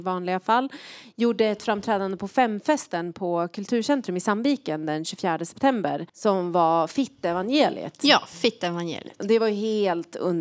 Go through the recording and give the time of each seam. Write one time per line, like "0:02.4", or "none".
0:06.1

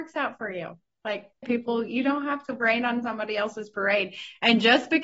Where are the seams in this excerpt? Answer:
0:01.4

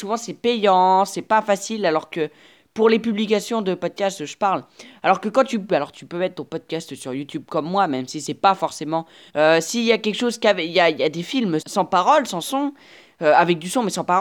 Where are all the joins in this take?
0:05.7
0:09.3
0:11.6

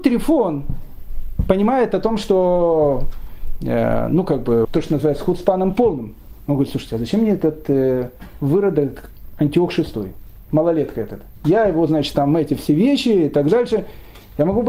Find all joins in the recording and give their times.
0:04.6

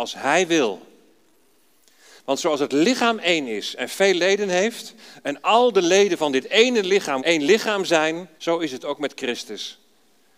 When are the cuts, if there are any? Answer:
0:07.2
0:08.4

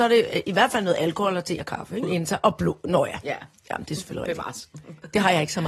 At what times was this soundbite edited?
0:02.0

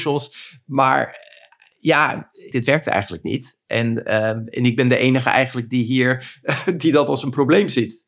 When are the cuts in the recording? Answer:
0:02.5

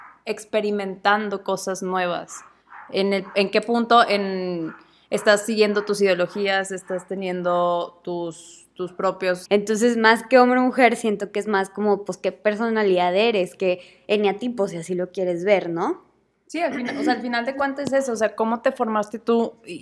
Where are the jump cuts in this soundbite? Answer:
0:09.5

